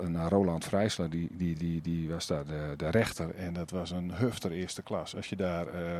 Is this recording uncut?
yes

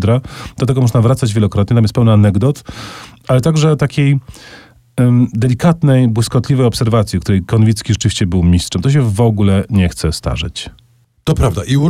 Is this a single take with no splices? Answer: yes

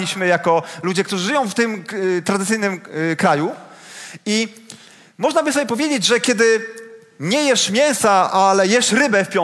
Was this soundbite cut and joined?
no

